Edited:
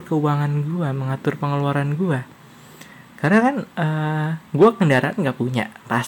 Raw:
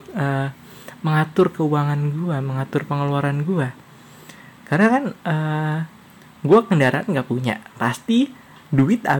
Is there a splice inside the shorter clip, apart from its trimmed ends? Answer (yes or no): yes